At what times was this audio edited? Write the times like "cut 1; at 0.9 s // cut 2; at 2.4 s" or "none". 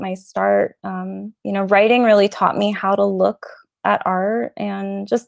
cut 1; at 1.4 s